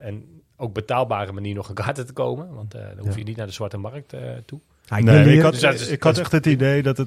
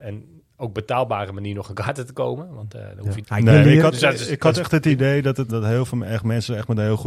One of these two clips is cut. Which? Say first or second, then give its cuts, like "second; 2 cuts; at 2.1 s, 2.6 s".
second; 2 cuts; at 3.2 s, 5.5 s